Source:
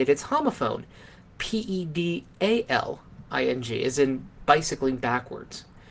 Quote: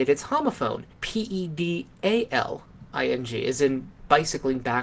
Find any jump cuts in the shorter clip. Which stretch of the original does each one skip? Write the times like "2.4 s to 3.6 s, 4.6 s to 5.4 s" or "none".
0.9 s to 1.3 s